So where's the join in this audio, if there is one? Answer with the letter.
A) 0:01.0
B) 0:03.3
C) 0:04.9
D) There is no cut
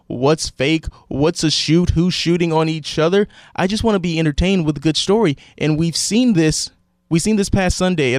D